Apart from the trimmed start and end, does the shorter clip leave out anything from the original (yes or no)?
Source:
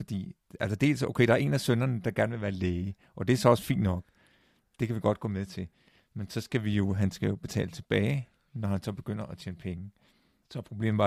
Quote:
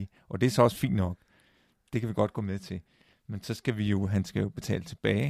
no